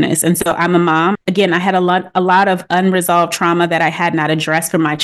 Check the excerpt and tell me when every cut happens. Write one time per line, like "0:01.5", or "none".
0:01.1